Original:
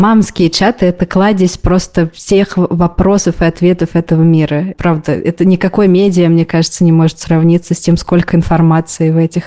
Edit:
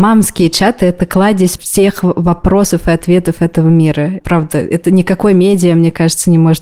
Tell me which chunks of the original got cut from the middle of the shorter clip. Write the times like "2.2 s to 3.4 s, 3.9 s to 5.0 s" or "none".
1.6 s to 2.1 s